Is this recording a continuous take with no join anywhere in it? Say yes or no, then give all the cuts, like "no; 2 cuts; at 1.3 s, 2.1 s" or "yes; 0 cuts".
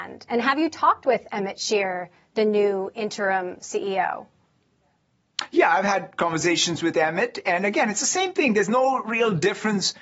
yes; 0 cuts